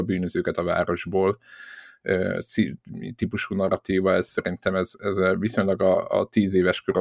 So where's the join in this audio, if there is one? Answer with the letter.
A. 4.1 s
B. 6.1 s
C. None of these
C